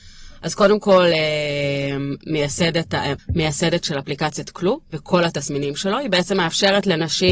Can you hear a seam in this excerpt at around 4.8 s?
yes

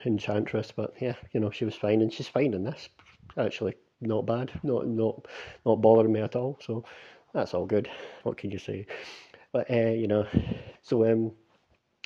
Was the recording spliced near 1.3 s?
no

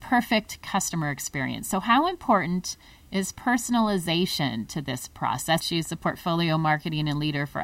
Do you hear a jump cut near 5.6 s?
yes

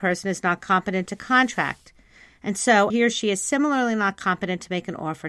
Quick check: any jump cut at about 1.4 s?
no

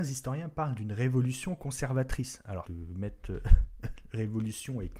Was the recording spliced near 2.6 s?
yes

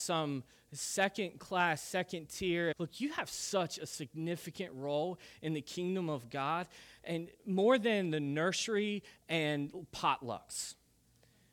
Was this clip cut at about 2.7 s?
yes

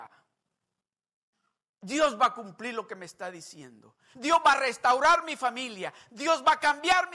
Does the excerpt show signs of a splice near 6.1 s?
no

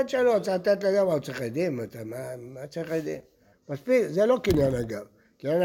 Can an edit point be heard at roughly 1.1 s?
no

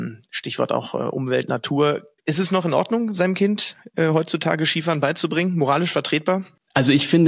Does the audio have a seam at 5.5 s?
no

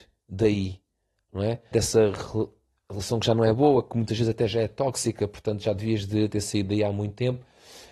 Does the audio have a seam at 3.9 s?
no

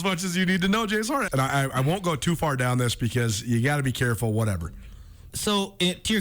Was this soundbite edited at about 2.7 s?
no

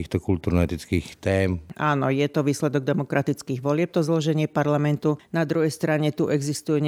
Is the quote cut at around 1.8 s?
no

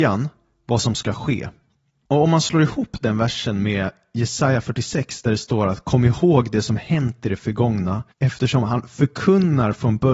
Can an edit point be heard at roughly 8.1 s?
yes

